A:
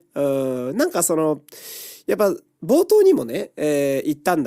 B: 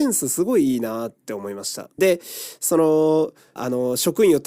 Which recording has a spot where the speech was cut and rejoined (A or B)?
B